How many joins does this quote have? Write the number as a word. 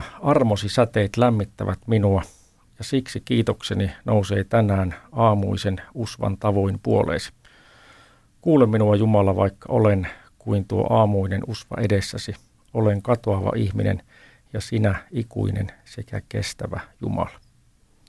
zero